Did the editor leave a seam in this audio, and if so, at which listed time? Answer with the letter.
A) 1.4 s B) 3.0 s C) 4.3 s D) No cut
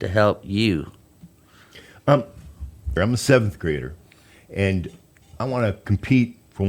B